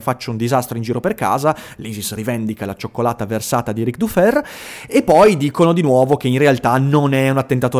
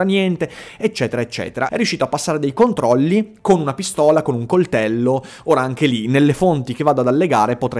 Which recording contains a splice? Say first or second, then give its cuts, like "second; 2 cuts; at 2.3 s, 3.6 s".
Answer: second; 1 cut; at 1.7 s